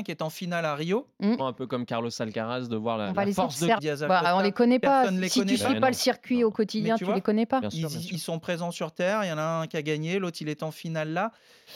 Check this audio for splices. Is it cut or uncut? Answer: cut